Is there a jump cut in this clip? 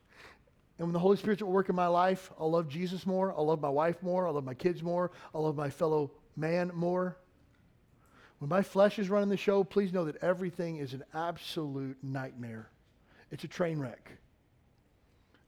no; 0 cuts

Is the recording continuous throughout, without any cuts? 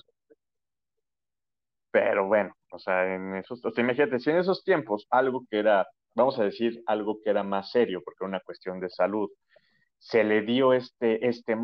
no; 1 cut; at 1.7 s

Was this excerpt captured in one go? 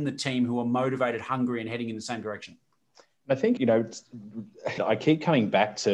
no; 2 cuts; at 3.6 s, 4.8 s

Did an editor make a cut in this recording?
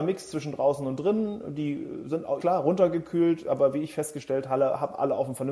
yes; 1 cut; at 2.4 s

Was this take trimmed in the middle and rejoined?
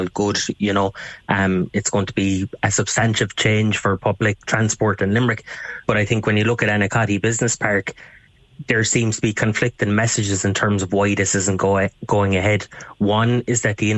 no; 0 cuts

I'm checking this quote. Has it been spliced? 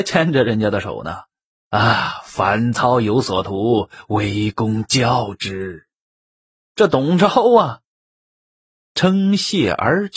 yes; 1 cut; at 6.7 s

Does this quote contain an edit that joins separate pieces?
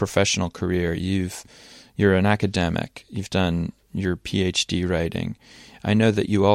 no; 0 cuts

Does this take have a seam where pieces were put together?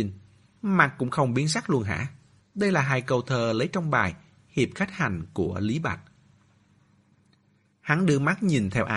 yes; 1 cut; at 2.4 s

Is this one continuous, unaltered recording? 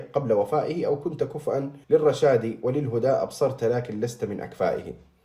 no; 1 cut; at 1.8 s

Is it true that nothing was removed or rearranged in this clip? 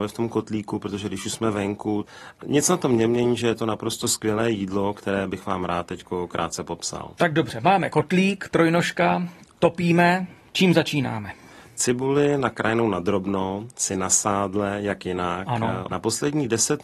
no; 1 cut; at 15.9 s

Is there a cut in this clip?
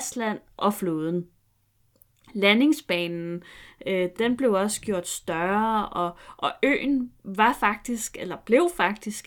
no; 0 cuts

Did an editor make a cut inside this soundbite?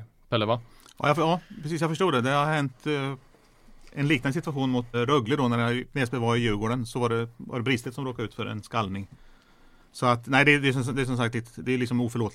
yes; 1 cut; at 4.9 s

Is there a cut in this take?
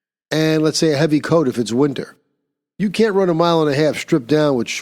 no; 0 cuts

